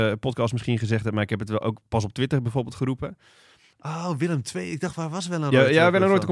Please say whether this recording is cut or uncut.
cut